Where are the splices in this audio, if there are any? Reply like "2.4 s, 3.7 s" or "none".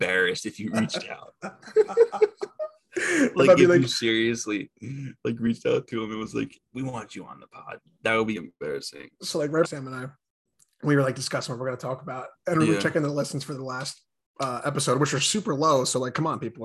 8.4 s, 9.6 s